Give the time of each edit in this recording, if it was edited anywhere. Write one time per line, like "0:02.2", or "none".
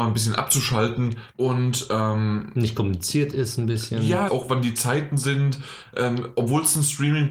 0:01.3
0:04.3

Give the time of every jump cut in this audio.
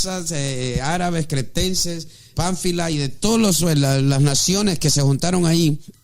0:02.3

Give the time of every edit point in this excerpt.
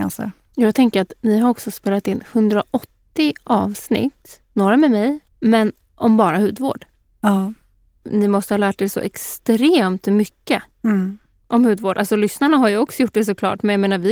0:05.3

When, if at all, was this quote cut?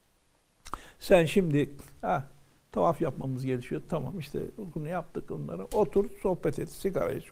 none

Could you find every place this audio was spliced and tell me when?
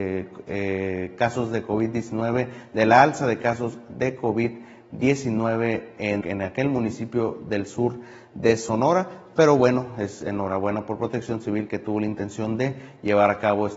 0:06.2

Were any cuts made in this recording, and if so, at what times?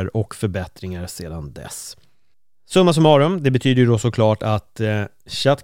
none

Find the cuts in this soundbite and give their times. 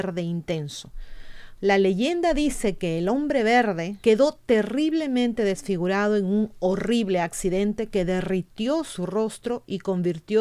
0:01.6
0:04.0

